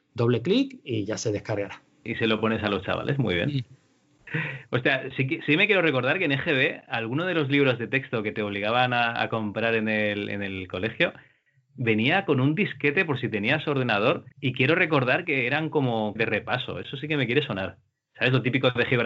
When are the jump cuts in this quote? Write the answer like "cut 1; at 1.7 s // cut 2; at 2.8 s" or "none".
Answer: cut 1; at 14.3 s // cut 2; at 16.2 s